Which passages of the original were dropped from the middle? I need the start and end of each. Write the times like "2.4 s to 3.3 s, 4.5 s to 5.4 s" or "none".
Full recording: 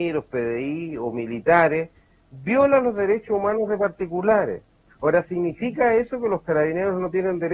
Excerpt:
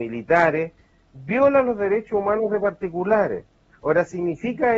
none